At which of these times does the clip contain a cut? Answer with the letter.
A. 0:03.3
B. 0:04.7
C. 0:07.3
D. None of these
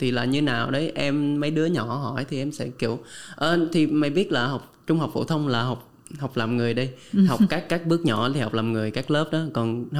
D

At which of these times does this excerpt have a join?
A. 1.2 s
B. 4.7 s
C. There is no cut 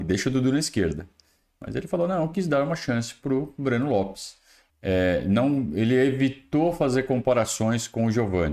B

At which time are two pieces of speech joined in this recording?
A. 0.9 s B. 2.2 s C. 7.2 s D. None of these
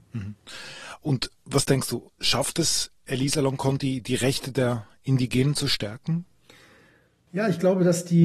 D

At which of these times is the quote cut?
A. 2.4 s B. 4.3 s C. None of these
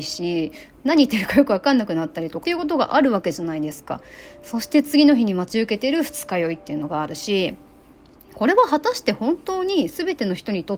A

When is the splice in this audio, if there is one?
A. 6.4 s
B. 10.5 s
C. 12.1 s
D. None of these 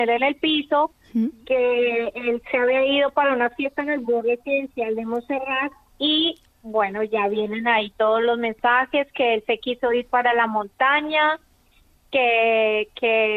D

